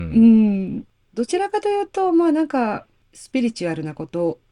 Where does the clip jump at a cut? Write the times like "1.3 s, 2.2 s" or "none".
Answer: none